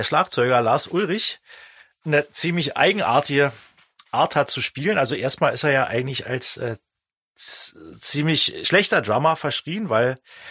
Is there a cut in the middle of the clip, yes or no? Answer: no